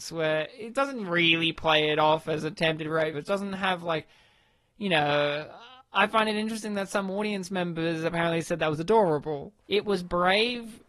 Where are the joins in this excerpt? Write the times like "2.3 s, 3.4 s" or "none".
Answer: 3.1 s, 9.6 s